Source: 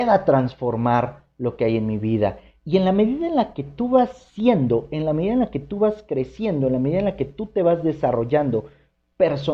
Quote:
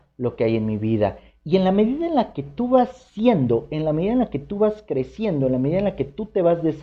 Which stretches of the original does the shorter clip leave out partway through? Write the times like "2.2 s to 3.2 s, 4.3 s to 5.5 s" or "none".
none